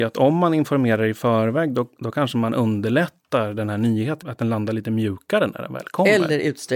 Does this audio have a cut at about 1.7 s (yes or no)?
no